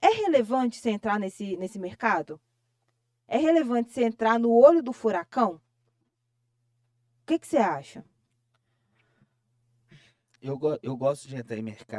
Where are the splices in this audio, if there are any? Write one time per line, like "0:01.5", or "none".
none

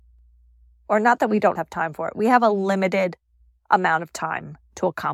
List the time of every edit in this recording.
0:01.6

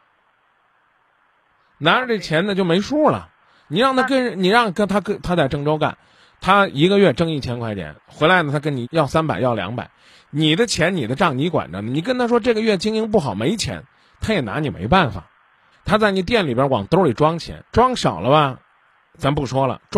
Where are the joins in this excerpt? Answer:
0:08.8
0:15.7
0:17.7

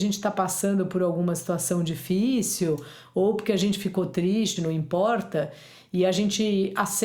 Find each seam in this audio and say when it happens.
0:04.6

